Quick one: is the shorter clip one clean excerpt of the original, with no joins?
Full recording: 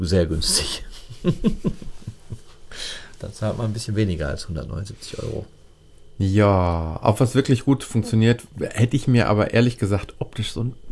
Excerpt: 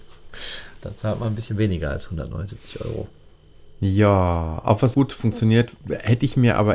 no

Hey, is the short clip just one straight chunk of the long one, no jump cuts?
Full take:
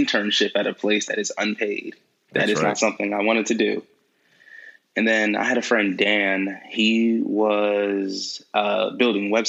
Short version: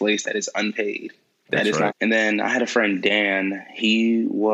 no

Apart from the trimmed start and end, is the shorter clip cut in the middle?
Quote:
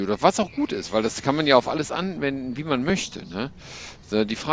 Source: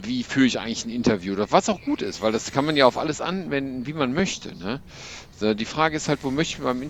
no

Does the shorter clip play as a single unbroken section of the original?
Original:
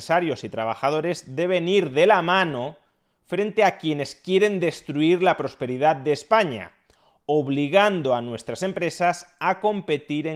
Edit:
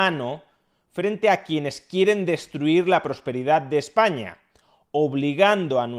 yes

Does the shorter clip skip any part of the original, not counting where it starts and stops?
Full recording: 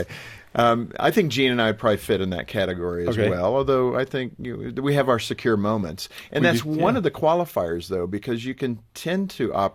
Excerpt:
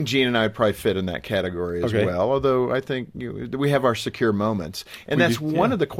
no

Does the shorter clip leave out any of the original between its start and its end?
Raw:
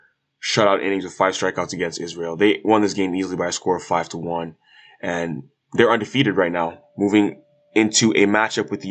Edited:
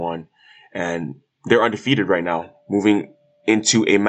no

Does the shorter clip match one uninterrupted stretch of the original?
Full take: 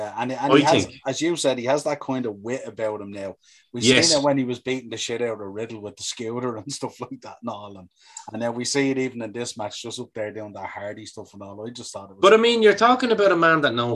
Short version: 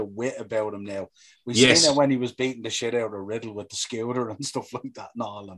yes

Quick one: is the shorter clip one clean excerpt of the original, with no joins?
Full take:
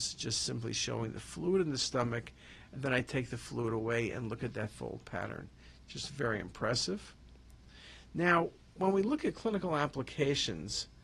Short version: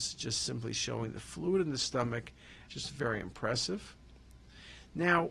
no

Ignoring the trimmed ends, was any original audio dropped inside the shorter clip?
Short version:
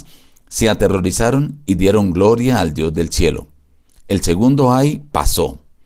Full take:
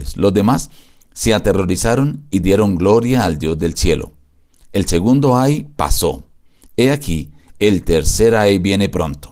no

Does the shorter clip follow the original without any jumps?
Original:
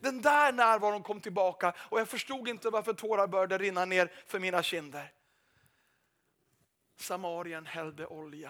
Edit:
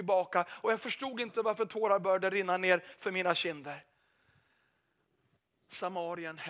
yes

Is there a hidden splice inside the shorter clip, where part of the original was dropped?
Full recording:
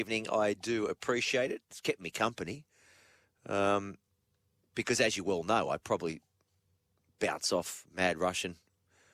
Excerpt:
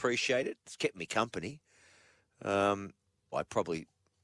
yes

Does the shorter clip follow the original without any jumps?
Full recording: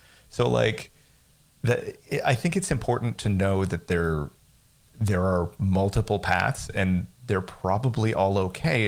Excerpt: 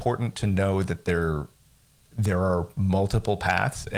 yes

